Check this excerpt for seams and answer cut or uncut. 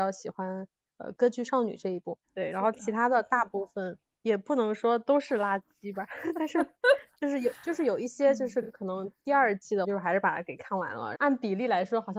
cut